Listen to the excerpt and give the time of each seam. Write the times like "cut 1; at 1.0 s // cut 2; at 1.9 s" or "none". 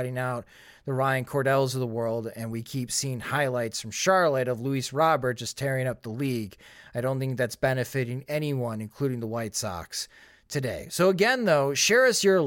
none